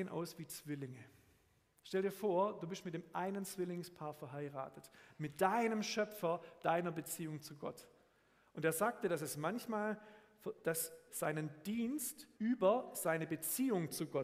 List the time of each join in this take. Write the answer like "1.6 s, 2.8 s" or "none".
8.5 s, 11.1 s, 12.3 s